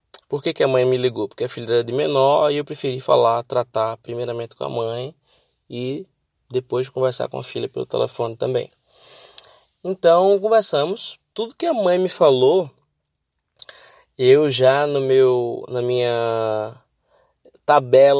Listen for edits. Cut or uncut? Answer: uncut